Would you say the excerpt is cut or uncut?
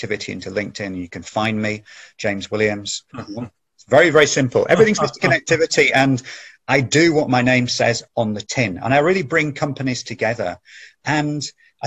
cut